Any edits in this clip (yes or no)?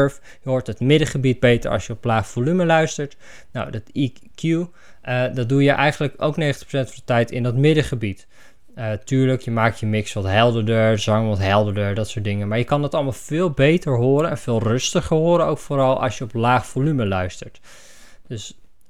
no